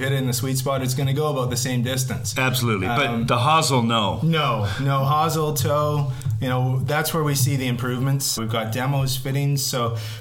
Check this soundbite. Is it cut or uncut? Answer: cut